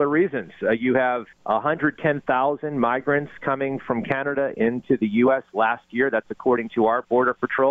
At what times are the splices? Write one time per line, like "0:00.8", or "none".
0:01.3

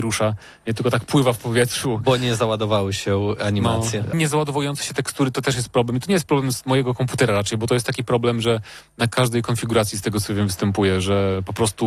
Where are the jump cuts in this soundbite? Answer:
0:04.1

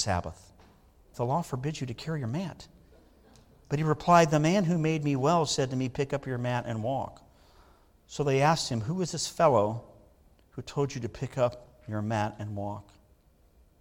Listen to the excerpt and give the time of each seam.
0:01.1

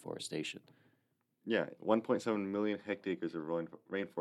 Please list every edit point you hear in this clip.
0:01.8

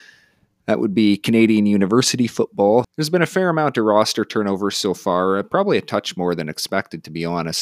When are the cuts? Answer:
0:02.8

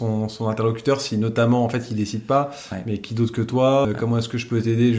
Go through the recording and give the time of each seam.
0:03.8

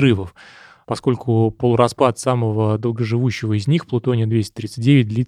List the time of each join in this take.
none

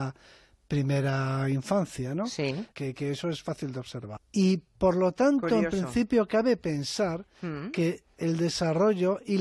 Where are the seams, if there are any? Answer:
0:02.7
0:04.2

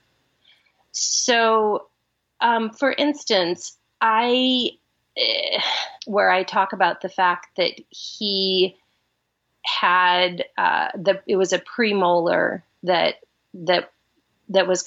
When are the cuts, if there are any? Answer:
0:06.0

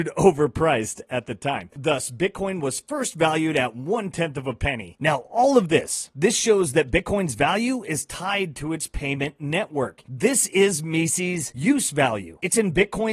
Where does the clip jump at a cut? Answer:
0:05.0

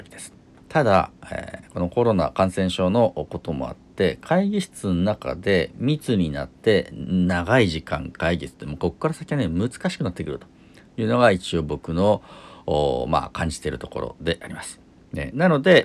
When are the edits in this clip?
none

